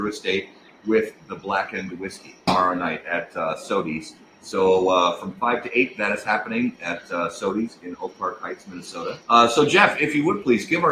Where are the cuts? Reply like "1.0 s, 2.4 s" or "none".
2.5 s, 9.2 s